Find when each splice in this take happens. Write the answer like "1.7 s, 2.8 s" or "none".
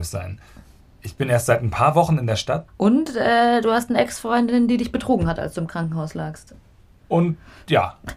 2.7 s